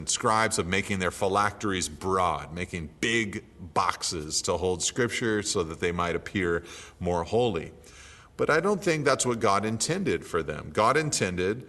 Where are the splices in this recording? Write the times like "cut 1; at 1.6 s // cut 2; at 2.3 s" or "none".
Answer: none